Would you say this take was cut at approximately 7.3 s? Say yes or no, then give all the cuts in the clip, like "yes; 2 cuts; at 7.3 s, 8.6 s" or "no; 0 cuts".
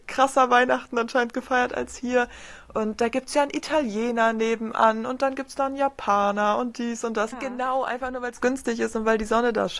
yes; 1 cut; at 7.3 s